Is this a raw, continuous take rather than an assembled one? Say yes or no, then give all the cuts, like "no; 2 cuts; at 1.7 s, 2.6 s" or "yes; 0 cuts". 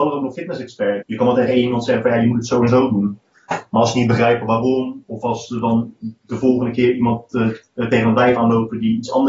no; 1 cut; at 1.0 s